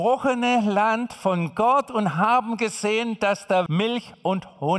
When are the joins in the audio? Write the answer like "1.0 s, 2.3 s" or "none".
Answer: 3.7 s

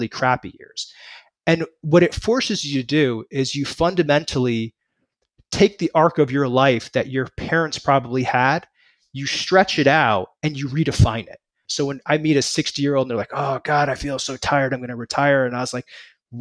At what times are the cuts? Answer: 11.6 s

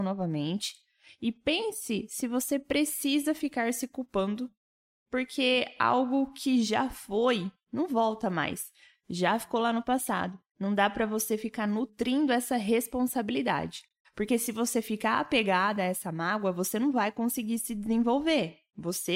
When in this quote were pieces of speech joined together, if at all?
10.5 s, 14.0 s

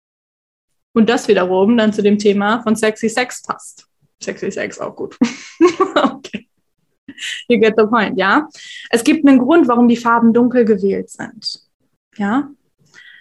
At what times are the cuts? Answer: none

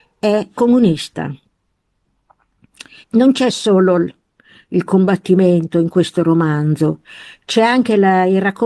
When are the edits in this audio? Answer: 3.0 s

